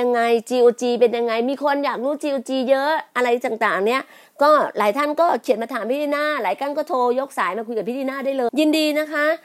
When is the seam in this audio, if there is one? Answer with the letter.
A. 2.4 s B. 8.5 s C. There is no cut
B